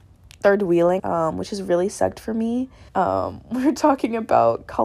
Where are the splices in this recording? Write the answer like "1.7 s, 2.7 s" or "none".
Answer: 1.0 s, 2.9 s